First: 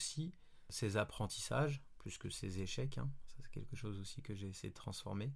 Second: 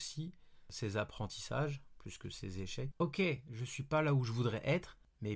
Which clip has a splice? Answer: second; 1 cut; at 2.9 s

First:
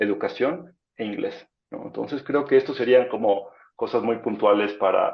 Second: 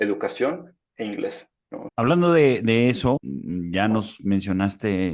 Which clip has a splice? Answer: second; 2 cuts; at 1.9 s, 3.2 s

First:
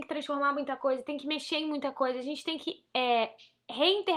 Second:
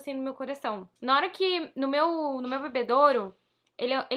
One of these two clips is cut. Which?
second; 1 cut; at 1.0 s

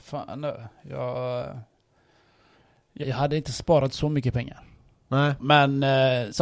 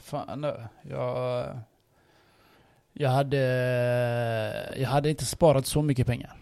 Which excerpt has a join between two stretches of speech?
first; 2 cuts; at 3.0 s, 5.4 s

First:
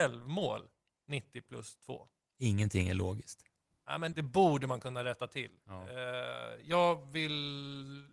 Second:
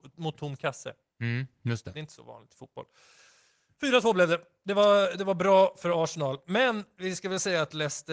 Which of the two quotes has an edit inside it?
first; 1 cut; at 4.1 s

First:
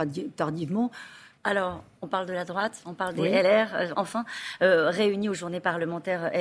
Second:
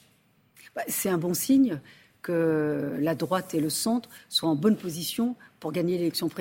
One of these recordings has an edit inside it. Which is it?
first; 2 cuts; at 1.4 s, 3.9 s

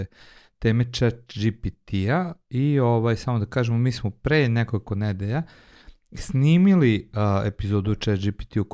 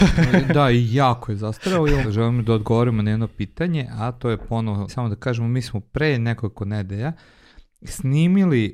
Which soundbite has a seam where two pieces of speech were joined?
second; 2 cuts; at 2.0 s, 4.9 s

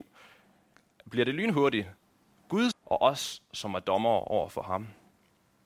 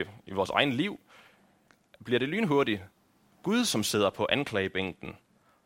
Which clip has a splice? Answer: first; 1 cut; at 2.7 s

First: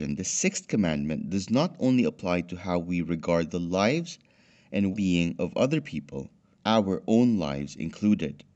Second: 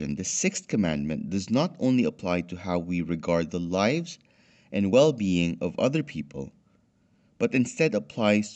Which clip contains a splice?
first; 2 cuts; at 4.9 s, 6.6 s

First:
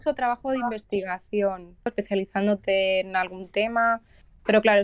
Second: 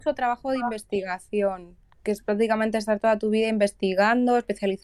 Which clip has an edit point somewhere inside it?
first; 1 cut; at 1.9 s

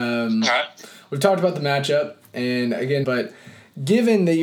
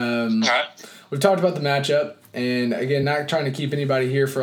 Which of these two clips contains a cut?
first; 1 cut; at 3.0 s

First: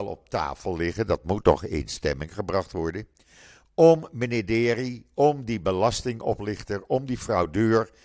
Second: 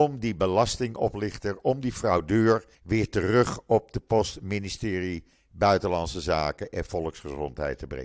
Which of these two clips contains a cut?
second; 1 cut; at 2.7 s

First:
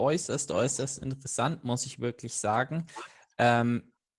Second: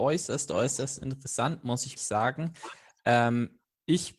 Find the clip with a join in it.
second; 1 cut; at 2.0 s

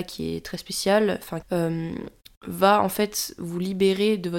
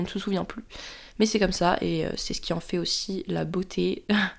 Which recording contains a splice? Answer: first; 1 cut; at 1.4 s

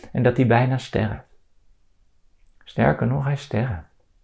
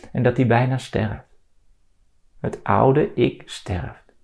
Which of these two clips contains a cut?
second; 1 cut; at 2.3 s

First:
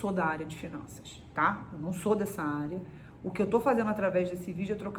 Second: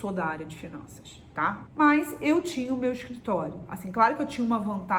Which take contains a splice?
second; 1 cut; at 1.7 s

